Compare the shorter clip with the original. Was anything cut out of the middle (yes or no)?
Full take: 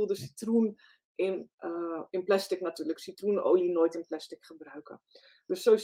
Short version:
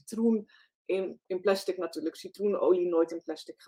yes